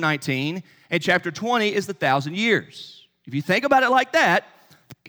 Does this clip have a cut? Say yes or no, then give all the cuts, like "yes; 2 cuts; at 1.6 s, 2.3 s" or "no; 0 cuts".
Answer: no; 0 cuts